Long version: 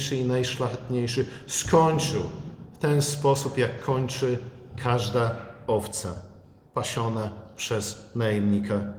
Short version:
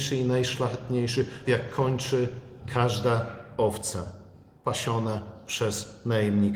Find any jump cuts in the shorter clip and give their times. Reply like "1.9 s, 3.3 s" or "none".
1.4 s

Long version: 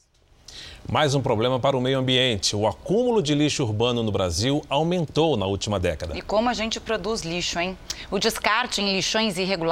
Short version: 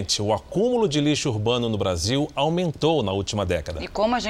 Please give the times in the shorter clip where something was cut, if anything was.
none

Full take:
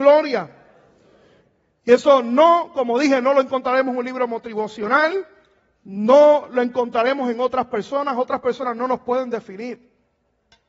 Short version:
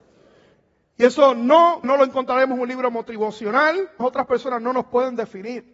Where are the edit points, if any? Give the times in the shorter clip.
1.8 s, 4.0 s

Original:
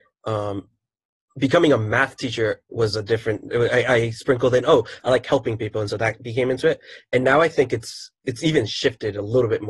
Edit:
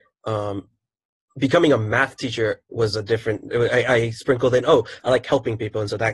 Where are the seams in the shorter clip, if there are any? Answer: none

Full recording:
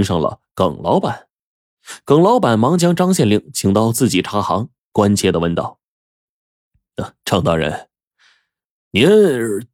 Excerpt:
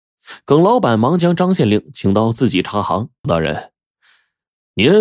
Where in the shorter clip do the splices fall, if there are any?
3.2 s

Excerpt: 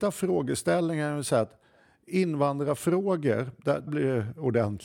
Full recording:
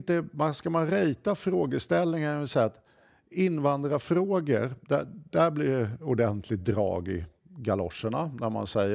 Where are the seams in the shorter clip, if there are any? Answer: 3.9 s

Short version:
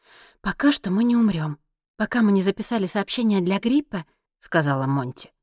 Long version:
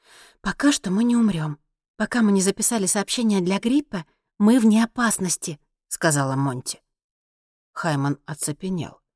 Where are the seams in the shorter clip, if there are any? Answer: 4.3 s

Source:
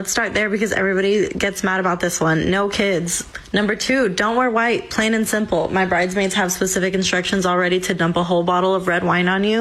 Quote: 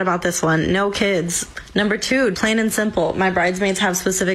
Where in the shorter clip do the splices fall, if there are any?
2.3 s

